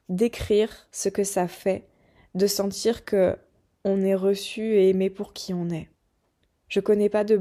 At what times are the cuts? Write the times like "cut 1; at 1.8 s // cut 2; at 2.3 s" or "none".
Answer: cut 1; at 3.7 s